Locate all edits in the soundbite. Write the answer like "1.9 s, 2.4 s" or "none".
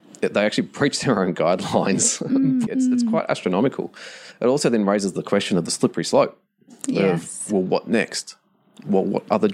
2.7 s